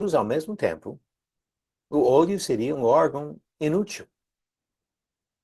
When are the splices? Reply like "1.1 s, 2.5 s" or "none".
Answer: 2.7 s